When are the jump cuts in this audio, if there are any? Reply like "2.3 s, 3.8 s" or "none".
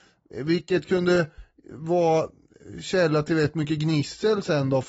none